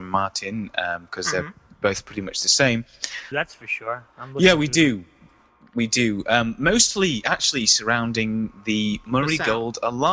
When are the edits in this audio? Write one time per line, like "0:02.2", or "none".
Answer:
0:03.3